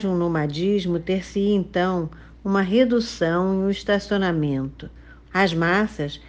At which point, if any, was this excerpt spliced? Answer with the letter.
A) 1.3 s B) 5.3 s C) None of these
B